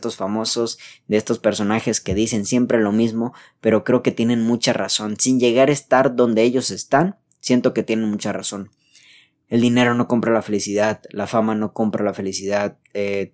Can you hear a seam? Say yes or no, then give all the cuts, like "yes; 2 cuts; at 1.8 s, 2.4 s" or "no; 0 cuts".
no; 0 cuts